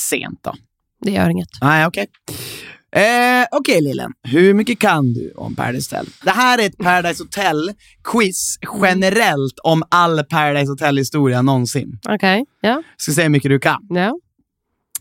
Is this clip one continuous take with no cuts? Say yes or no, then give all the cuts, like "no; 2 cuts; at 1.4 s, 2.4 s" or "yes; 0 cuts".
no; 1 cut; at 6.2 s